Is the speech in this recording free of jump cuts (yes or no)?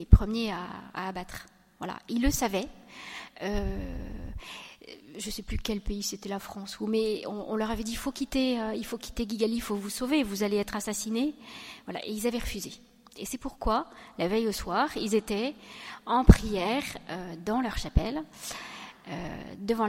yes